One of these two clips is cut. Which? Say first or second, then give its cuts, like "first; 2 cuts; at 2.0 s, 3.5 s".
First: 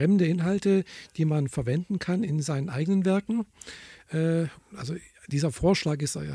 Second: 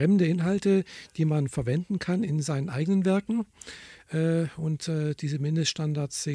first; 1 cut; at 4.6 s